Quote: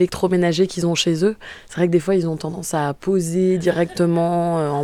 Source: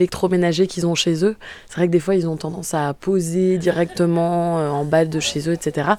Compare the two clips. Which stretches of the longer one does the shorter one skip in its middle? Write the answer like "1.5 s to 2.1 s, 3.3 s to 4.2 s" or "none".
none